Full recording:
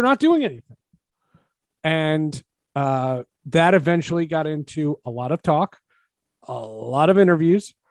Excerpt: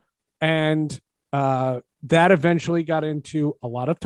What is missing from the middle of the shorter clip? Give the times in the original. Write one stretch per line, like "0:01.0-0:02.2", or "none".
none